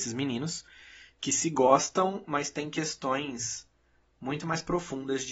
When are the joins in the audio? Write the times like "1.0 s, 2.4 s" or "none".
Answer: none